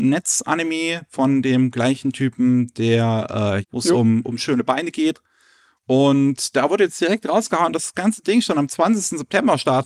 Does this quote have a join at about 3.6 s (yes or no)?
yes